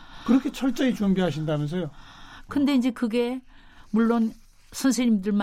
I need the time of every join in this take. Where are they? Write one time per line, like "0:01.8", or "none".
0:02.5